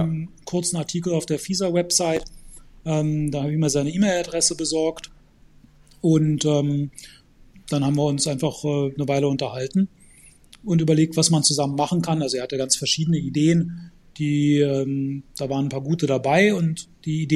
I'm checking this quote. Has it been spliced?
no; 0 cuts

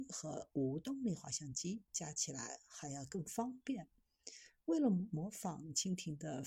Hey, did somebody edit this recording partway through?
no; 0 cuts

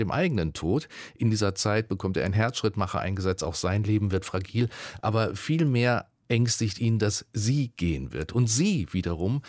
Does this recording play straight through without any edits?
yes; 0 cuts

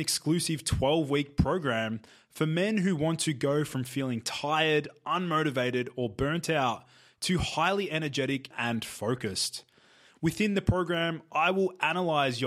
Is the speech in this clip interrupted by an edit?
yes; 1 cut; at 8.5 s

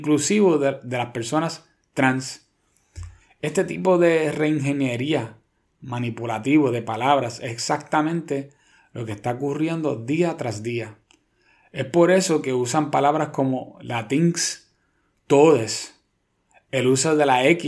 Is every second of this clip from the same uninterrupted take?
yes; 0 cuts

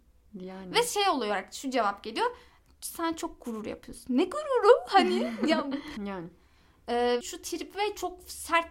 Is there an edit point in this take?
yes; 2 cuts; at 6.0 s, 7.2 s

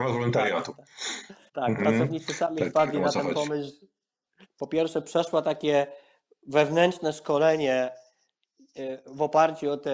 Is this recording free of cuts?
no; 2 cuts; at 1.5 s, 4.4 s

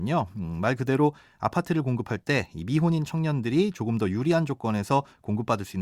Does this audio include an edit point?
no; 0 cuts

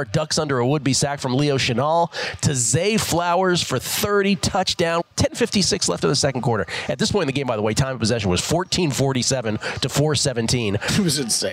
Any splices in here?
yes; 1 cut; at 5.0 s

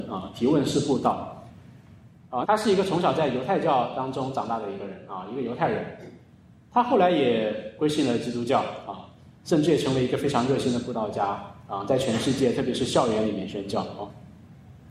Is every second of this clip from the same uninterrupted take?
no; 1 cut; at 2.4 s

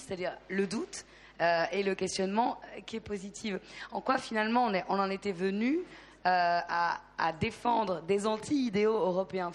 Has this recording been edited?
no; 0 cuts

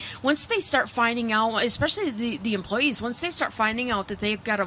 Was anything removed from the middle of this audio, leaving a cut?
no; 0 cuts

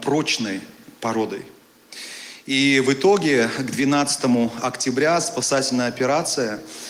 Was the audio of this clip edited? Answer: no; 0 cuts

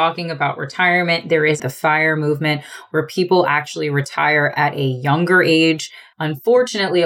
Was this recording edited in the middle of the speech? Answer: yes; 1 cut; at 6.1 s

